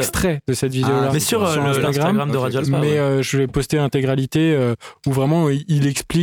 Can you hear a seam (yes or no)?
no